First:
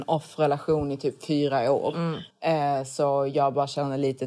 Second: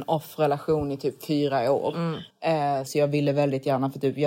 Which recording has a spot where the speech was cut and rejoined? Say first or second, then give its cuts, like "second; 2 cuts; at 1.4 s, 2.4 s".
second; 1 cut; at 2.9 s